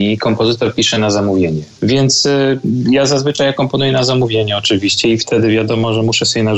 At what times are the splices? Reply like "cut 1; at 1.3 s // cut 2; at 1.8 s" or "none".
cut 1; at 1.7 s // cut 2; at 3.5 s